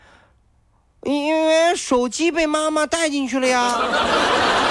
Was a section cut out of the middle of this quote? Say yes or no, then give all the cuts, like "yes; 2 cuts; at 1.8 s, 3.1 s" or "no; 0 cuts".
no; 0 cuts